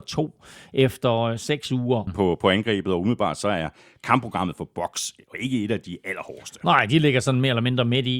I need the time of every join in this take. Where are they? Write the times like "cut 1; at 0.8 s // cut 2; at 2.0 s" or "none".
cut 1; at 2.1 s